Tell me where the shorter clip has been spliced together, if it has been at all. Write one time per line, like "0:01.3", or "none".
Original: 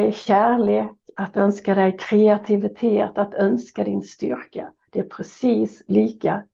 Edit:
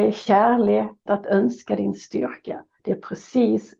0:01.1